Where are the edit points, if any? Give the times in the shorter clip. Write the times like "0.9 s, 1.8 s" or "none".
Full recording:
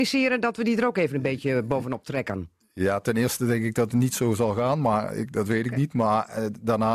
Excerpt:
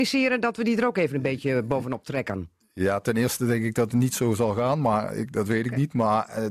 none